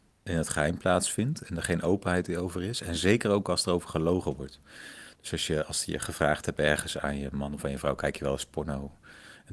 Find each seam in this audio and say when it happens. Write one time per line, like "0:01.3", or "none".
none